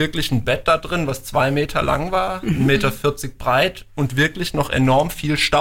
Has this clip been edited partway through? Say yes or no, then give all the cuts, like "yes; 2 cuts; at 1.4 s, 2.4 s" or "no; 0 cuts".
no; 0 cuts